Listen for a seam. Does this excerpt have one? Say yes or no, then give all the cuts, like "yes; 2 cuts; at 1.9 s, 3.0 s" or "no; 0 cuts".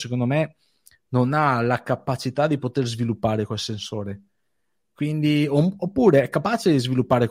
no; 0 cuts